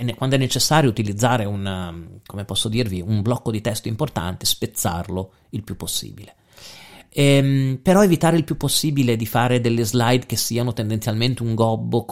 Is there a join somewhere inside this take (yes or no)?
no